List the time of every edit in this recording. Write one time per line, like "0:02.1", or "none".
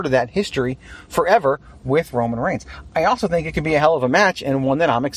none